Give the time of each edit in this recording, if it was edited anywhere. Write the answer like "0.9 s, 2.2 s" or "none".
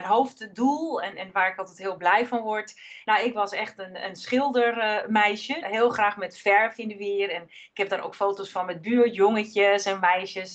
3.0 s, 5.6 s